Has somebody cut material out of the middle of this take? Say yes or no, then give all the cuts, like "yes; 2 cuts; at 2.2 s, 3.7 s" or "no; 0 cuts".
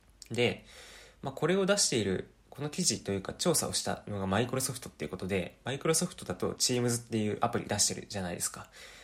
no; 0 cuts